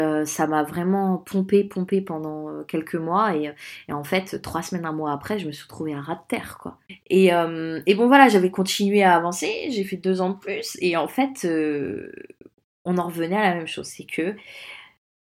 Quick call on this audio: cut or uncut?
uncut